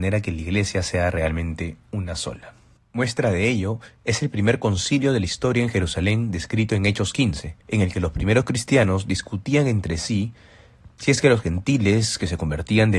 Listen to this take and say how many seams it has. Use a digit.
2